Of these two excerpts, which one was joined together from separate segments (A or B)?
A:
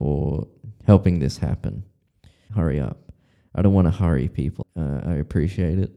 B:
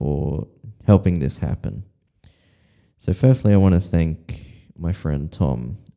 A